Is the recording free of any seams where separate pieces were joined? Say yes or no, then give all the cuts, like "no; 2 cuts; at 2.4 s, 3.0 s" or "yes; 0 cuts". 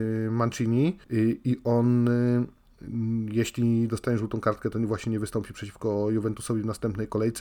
no; 1 cut; at 1.0 s